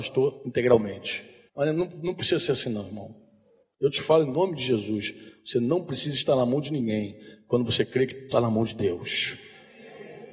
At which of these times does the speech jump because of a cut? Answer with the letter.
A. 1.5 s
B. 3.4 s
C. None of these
A